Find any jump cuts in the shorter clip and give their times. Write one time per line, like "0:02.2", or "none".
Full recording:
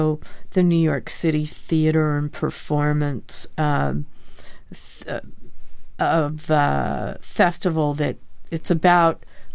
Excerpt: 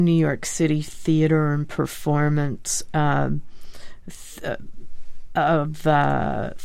none